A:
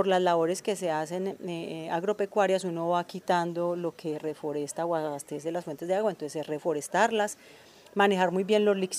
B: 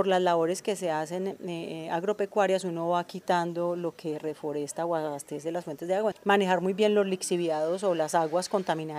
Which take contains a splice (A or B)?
B